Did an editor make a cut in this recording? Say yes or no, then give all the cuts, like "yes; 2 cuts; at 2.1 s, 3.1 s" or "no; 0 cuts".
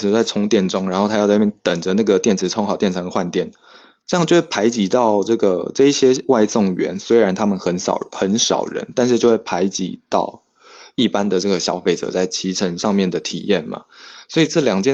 no; 0 cuts